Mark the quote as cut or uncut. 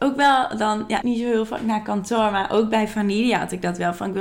cut